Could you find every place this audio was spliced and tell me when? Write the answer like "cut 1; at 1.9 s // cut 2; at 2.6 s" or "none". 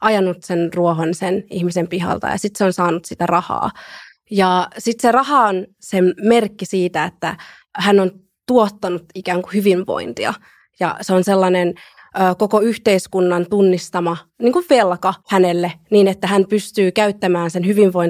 cut 1; at 15.2 s